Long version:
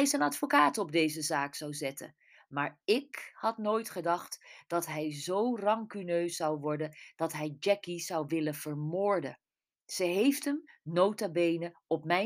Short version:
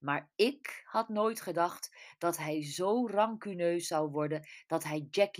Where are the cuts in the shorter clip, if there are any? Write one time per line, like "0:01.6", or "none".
none